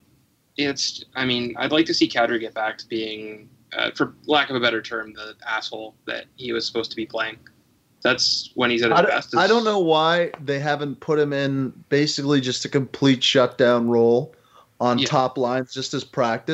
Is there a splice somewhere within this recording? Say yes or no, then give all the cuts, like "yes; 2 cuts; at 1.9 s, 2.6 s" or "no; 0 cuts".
no; 0 cuts